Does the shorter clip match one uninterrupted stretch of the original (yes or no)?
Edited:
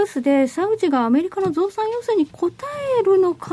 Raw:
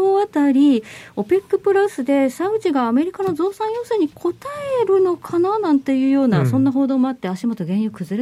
yes